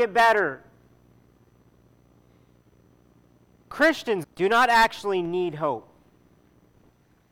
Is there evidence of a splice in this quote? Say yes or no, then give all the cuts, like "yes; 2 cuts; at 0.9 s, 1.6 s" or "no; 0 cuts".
yes; 1 cut; at 4.2 s